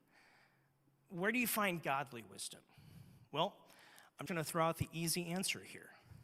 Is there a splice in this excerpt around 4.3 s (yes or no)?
yes